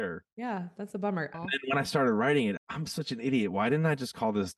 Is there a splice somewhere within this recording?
yes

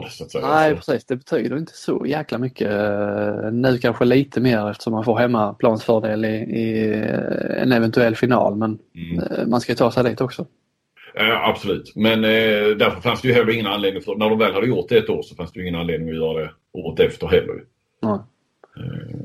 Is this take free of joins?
yes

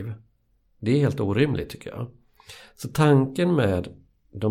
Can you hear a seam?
no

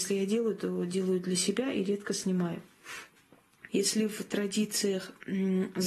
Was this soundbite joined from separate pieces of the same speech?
yes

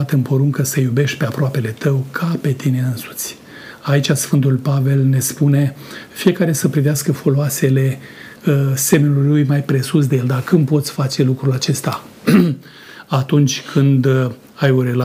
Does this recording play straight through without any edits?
yes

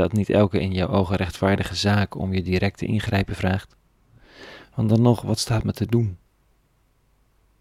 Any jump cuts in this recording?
no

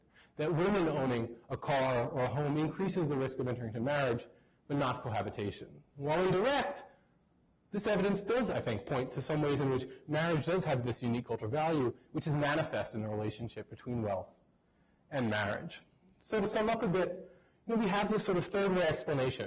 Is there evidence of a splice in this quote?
no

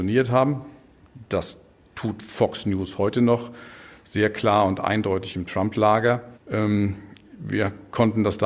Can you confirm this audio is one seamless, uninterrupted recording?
no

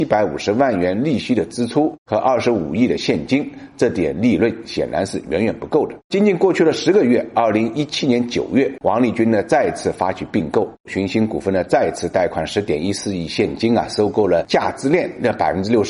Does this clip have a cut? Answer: no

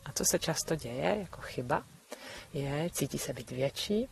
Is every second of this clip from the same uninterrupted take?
no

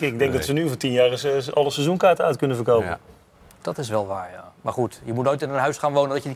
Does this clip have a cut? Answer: no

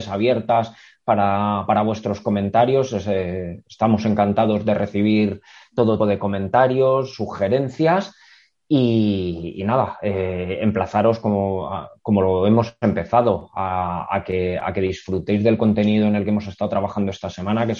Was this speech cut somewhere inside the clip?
yes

